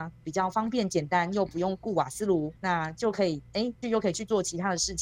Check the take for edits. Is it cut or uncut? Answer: cut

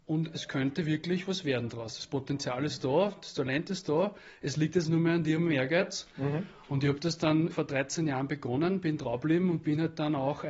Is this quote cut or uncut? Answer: cut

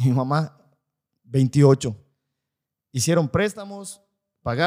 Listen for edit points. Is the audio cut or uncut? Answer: uncut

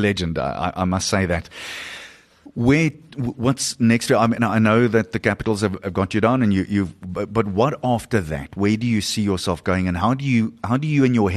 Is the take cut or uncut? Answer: uncut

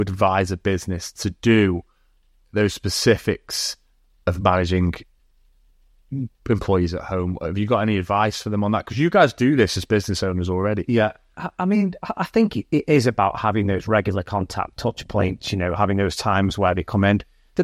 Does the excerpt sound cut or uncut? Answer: uncut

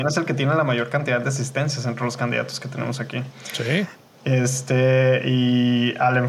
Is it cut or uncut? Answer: uncut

